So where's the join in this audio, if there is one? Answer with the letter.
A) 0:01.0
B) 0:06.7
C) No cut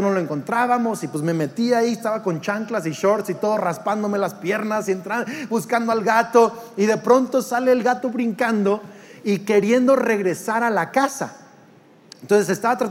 C